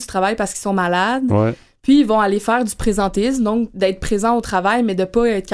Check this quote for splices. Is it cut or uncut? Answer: uncut